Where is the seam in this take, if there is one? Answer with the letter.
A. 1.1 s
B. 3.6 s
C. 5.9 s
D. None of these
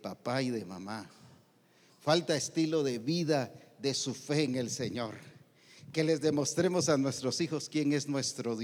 D